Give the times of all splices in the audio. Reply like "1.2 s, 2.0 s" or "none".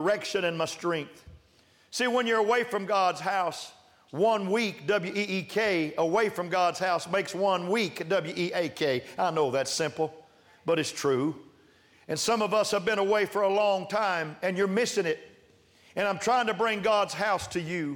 none